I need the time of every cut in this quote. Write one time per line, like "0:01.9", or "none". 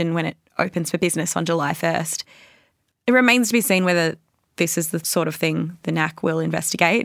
0:02.9